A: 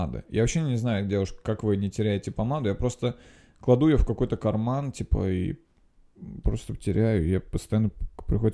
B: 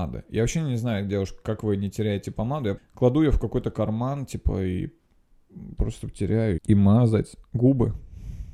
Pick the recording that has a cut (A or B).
B